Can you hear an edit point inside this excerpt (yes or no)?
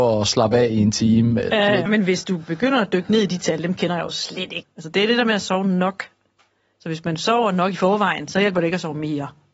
yes